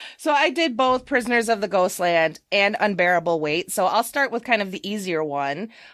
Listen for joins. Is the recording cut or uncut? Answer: uncut